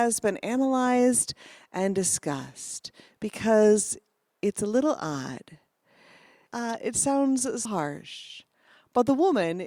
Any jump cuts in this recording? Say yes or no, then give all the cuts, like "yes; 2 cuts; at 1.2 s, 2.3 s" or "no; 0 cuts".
yes; 2 cuts; at 6.5 s, 7.6 s